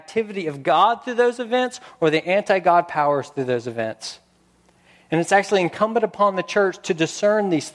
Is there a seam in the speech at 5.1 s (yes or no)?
no